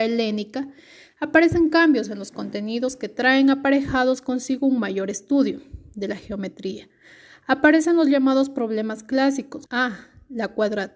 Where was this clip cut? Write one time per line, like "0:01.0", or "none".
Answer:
0:09.7